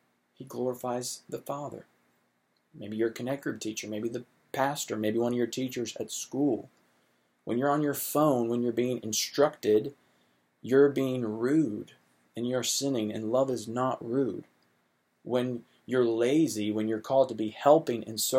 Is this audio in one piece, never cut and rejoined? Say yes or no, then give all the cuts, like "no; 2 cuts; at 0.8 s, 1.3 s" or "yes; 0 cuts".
no; 1 cut; at 2.6 s